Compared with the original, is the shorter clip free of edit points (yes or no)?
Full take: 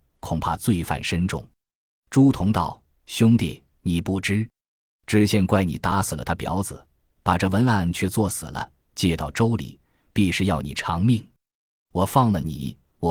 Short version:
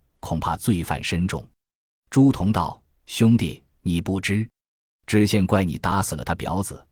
yes